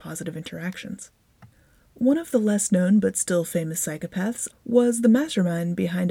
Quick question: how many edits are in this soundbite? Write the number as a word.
one